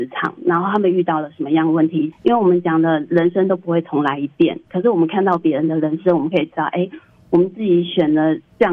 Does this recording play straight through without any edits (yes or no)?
no